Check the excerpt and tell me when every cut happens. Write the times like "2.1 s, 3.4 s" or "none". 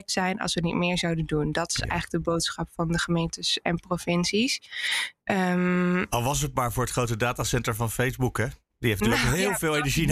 5.2 s